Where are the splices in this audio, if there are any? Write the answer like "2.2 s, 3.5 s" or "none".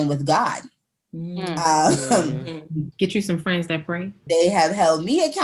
2.9 s, 4.3 s